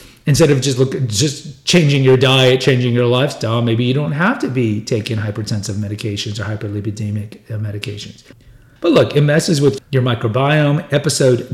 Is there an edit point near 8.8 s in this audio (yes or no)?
yes